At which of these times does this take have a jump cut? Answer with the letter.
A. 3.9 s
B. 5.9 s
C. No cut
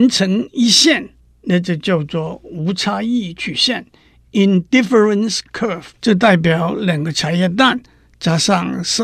B